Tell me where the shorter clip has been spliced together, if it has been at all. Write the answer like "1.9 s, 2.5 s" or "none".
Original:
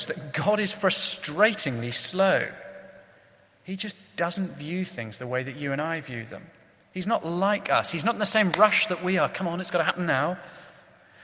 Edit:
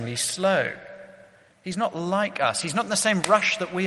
1.5 s

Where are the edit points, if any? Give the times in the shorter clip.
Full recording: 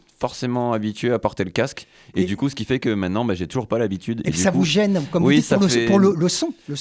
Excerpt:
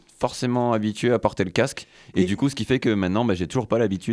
none

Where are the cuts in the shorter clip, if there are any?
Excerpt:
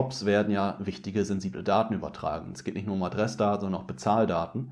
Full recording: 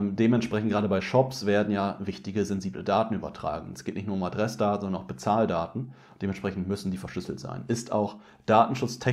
none

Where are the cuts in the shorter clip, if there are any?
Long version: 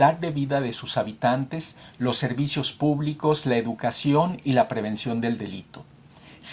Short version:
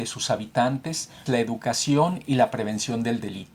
1.3 s

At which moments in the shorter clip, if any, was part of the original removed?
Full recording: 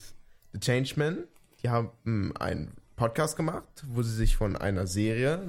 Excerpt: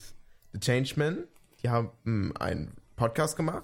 none

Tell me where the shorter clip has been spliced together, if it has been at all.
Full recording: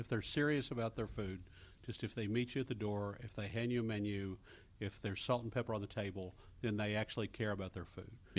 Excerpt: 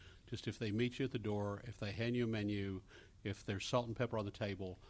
none

